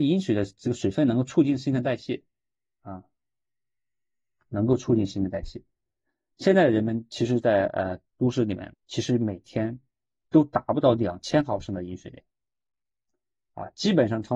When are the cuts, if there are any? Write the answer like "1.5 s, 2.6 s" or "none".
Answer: 8.7 s